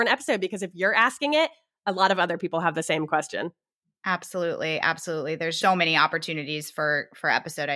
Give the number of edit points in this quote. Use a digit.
1